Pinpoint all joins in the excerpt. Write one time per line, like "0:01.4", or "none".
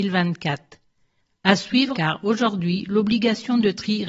0:01.9